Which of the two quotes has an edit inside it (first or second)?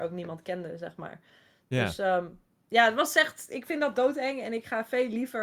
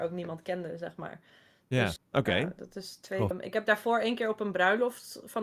second